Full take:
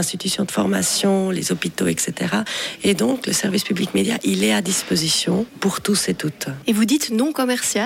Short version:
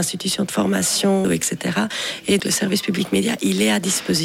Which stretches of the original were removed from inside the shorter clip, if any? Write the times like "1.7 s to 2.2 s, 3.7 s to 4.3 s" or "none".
1.2 s to 1.8 s, 3.0 s to 3.2 s

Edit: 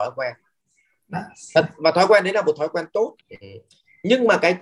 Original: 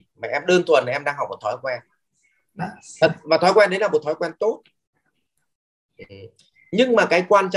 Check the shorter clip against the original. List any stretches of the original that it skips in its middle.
4.7 s to 5.9 s

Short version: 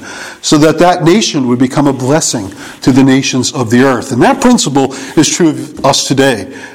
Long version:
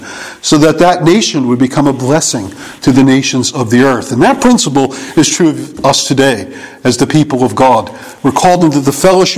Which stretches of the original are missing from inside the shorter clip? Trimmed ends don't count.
none

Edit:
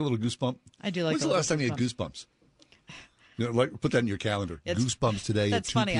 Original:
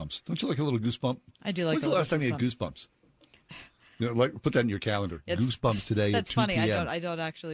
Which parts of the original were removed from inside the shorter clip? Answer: none

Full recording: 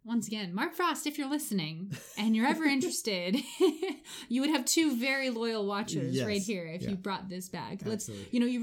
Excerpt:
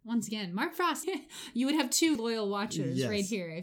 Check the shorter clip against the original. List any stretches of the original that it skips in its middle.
1.0 s to 3.8 s, 4.9 s to 5.3 s

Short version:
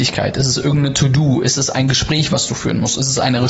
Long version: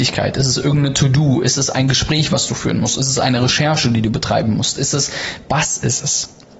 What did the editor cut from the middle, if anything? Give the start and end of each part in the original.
none

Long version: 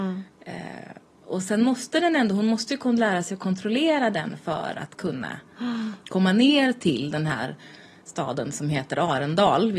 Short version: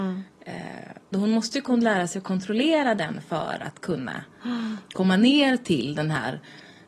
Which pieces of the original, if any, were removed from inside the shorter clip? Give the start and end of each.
1.1 s to 2.3 s

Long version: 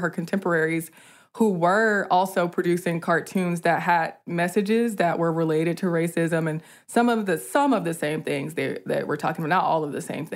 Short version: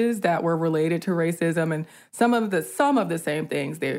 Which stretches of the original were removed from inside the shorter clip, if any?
none

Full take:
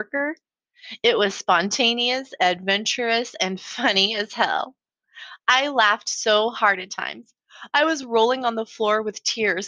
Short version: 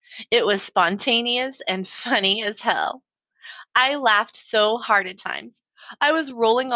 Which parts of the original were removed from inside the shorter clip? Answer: 2.4 s to 3.4 s

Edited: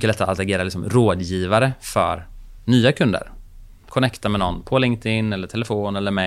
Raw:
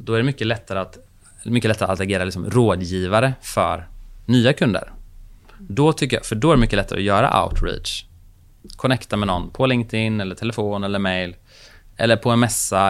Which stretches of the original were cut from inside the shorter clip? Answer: 5.5 s to 8.8 s

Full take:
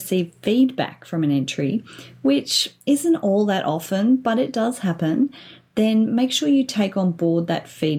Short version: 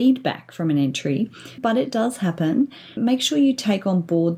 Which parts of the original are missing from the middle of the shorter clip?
2.1 s to 4.2 s, 5.6 s to 6.1 s

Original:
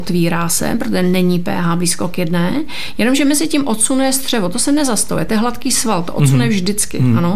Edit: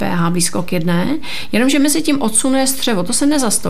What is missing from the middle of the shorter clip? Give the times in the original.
none

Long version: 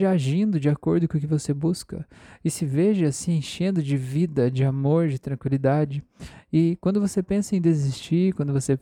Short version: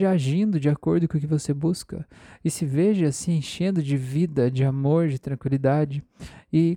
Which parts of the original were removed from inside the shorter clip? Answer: none

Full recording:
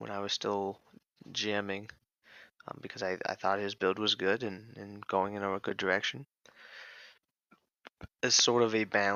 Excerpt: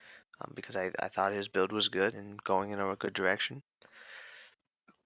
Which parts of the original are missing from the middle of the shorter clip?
4.4 s to 4.7 s

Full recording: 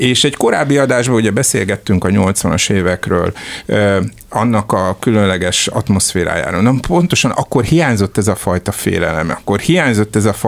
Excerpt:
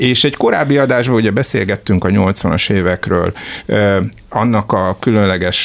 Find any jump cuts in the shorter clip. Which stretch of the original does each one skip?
none

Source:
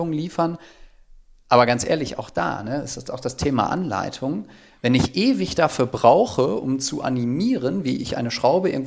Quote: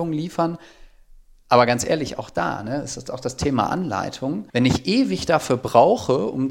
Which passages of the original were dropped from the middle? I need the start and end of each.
4.5 s to 4.8 s

